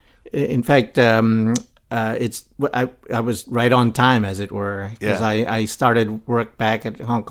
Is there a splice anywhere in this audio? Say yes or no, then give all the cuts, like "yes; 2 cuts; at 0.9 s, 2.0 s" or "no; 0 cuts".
yes; 1 cut; at 3.4 s